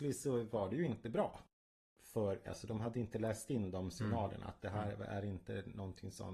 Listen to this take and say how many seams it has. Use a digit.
1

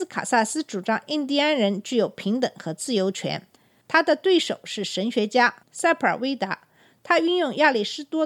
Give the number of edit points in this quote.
1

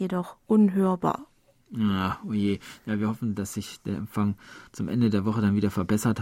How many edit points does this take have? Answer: 0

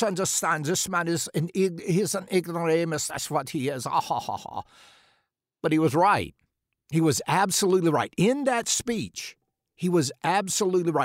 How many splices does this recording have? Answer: 0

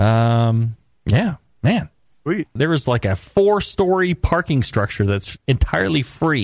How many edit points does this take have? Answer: 1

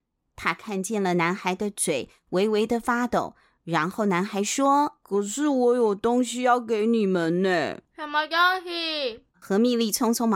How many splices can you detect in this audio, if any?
3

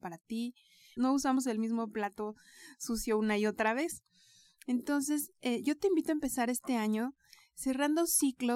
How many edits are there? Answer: 1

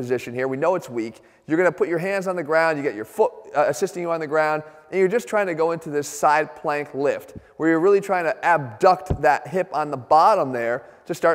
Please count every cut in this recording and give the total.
0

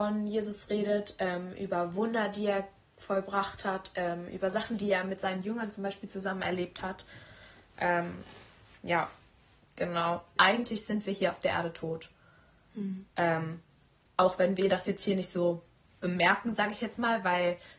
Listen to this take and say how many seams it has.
1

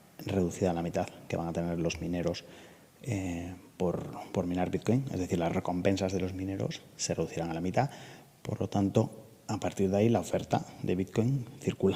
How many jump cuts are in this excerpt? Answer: 0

